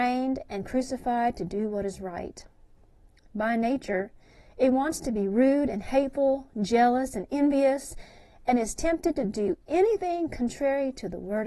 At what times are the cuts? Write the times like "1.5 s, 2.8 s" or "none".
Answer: none